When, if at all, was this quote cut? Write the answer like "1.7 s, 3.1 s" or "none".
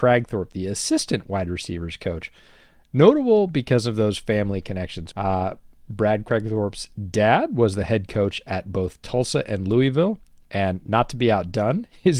5.1 s